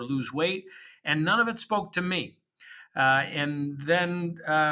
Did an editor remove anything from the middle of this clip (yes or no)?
no